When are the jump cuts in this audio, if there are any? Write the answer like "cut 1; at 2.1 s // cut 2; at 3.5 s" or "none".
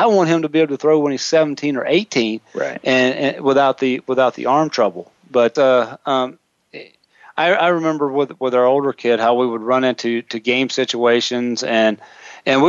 cut 1; at 5.6 s